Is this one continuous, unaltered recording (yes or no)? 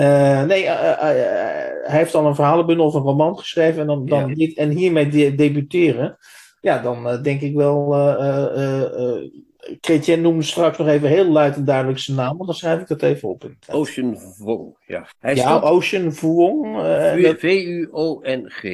no